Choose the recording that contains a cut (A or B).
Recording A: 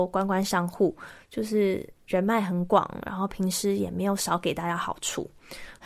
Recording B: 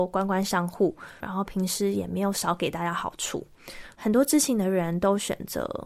B